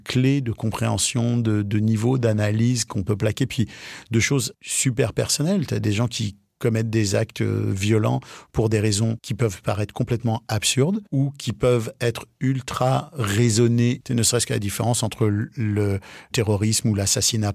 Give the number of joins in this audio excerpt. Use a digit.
0